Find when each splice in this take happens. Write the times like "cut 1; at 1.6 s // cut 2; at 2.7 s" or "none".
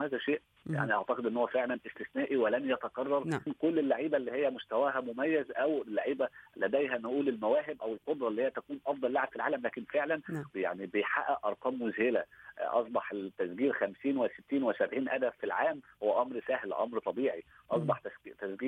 cut 1; at 3.5 s // cut 2; at 10.5 s